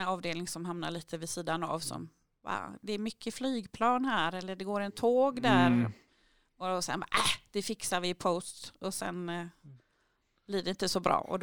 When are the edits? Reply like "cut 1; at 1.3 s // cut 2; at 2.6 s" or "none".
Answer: none